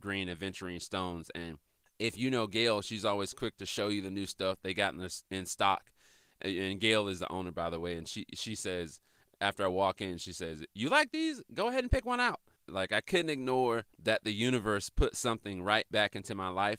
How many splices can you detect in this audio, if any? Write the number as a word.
two